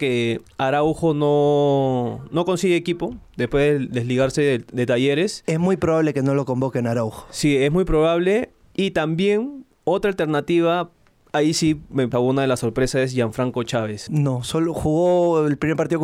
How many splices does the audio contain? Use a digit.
2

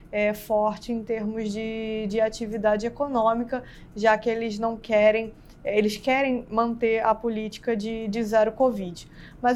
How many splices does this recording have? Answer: 0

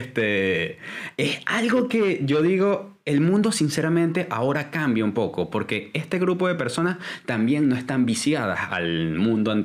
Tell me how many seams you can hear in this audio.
0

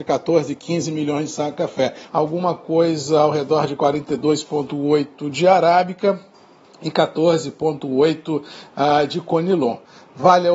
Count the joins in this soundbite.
1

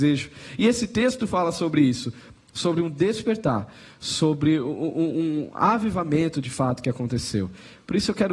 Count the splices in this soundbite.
0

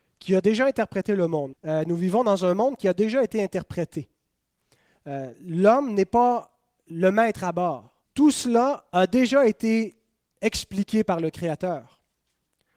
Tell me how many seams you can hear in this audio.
2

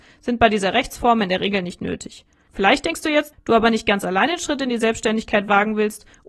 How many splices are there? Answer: 1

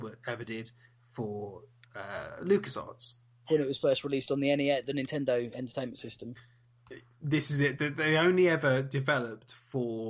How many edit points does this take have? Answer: 1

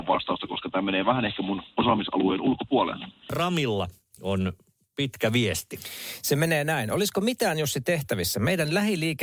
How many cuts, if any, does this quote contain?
0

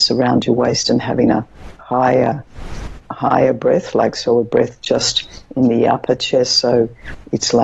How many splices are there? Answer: 0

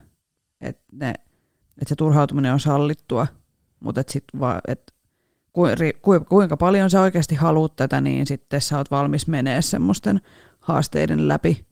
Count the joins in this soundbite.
1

